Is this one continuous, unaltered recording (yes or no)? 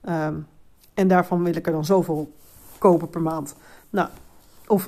yes